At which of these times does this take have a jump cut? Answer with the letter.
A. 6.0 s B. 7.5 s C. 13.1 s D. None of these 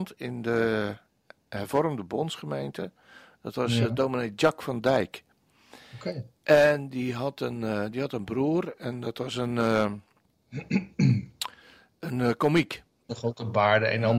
C